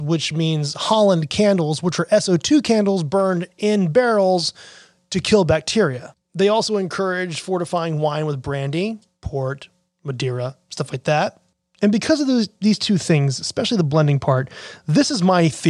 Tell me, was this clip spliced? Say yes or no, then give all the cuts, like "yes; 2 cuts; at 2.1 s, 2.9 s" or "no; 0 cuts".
no; 0 cuts